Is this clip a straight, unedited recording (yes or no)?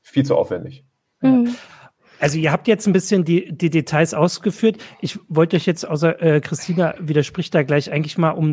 yes